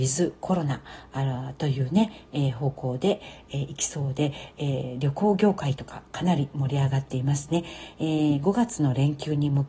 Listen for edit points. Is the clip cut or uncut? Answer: uncut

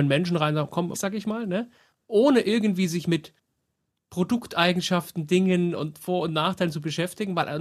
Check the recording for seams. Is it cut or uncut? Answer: cut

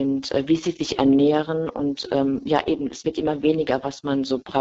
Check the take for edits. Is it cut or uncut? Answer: uncut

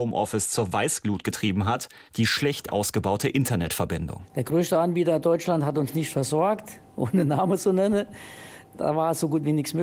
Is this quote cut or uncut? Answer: cut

